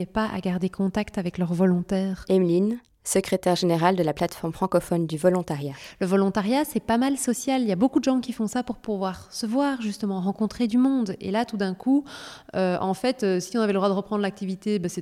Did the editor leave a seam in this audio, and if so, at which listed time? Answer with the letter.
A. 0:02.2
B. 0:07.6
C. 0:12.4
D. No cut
D